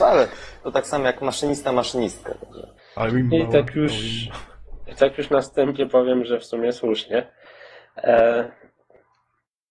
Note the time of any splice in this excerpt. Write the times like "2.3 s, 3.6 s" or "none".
2.8 s